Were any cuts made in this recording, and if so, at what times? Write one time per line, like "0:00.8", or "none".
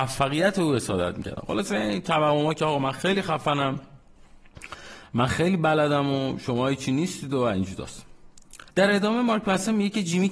0:08.7